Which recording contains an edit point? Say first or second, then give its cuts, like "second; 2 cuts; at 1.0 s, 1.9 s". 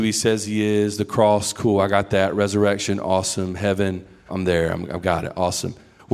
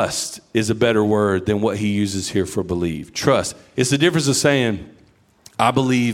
first; 1 cut; at 4.3 s